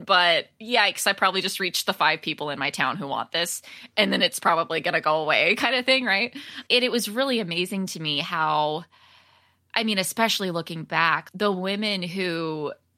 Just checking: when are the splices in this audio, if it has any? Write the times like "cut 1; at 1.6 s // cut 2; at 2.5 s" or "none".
none